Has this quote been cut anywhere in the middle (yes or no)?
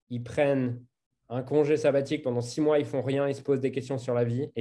no